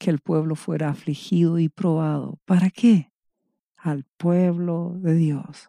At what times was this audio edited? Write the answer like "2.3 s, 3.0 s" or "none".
3.6 s